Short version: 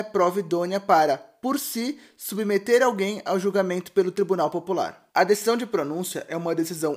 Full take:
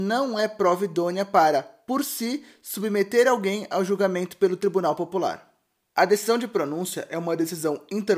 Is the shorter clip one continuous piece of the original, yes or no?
no